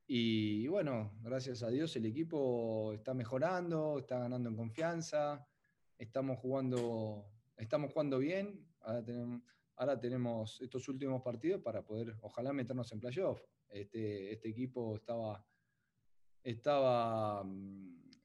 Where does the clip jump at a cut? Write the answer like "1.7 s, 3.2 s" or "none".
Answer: none

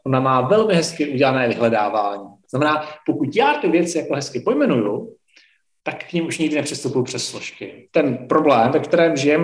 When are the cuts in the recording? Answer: none

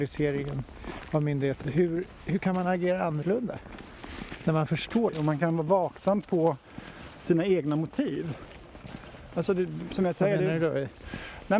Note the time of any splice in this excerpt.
1.6 s

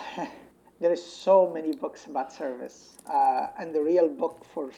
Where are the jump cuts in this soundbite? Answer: none

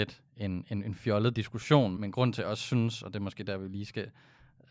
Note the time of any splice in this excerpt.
2.0 s

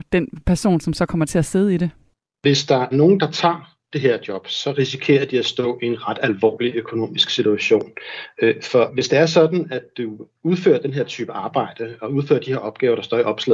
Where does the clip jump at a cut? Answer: 2.9 s

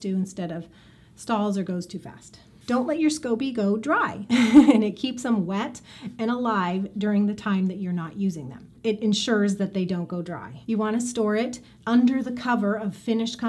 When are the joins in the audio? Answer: 4.3 s, 10.6 s

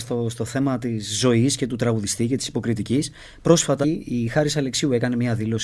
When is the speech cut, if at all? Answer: 3.8 s

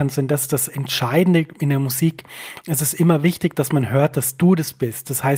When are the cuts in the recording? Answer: 2.6 s

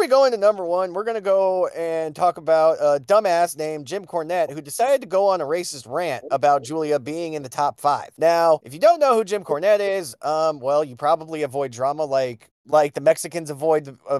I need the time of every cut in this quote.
none

